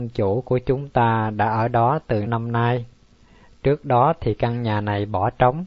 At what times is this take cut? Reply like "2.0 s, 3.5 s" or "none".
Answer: 2.3 s